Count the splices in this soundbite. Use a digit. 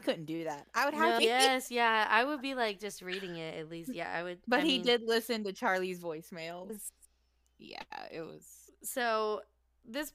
2